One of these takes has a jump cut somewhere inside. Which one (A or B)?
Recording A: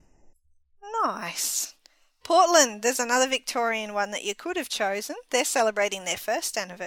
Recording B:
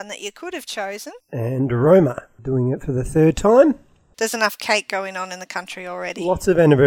B